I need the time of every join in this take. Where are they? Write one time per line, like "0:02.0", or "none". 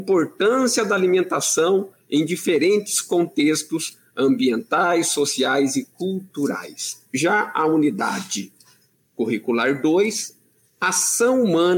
0:07.1